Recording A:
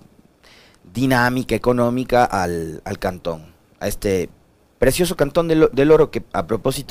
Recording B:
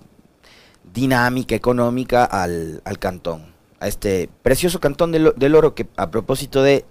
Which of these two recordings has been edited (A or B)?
B